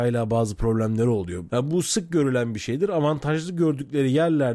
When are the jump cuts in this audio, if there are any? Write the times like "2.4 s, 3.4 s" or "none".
1.5 s

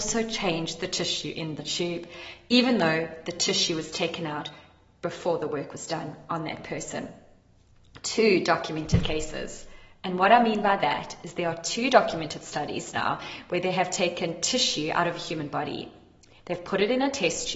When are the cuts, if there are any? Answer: 9.9 s

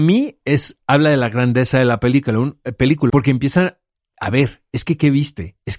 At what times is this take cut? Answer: 3.1 s

